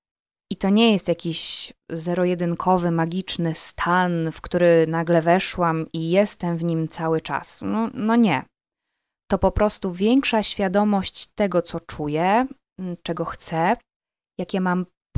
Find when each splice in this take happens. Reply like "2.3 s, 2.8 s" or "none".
none